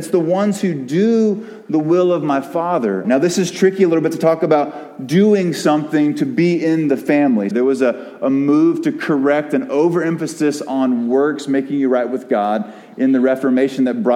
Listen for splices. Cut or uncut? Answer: cut